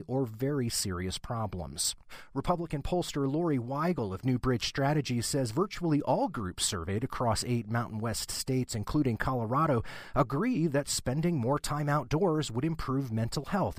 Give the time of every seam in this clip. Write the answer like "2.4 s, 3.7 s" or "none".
none